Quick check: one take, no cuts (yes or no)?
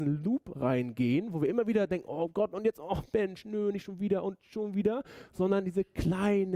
yes